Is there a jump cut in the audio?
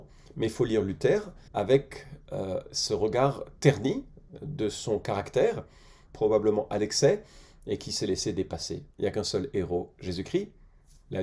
yes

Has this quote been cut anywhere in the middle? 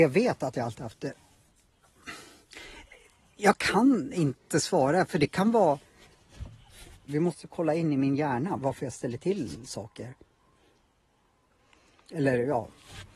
yes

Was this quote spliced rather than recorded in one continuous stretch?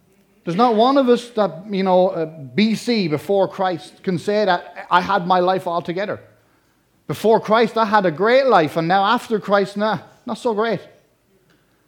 no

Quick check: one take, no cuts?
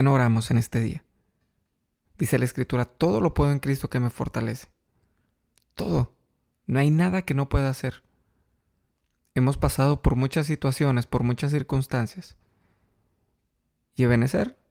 no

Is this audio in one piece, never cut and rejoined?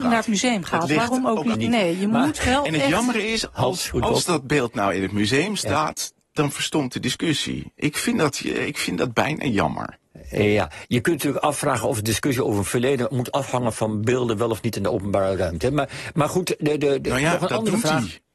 no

